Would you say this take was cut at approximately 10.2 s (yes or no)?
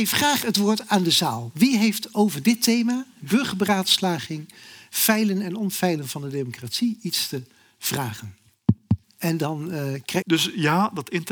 yes